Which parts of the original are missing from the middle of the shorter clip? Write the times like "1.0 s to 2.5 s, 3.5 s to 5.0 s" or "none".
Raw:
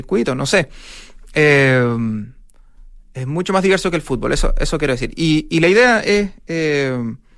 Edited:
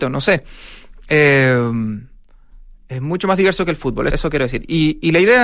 4.4 s to 4.6 s